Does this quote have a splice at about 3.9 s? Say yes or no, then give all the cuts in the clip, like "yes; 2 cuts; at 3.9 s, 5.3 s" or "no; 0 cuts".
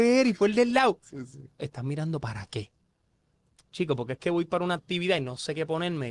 no; 1 cut; at 1.6 s